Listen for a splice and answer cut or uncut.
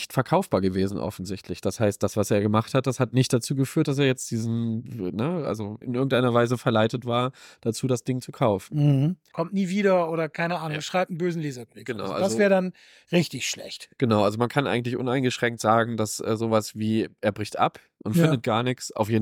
cut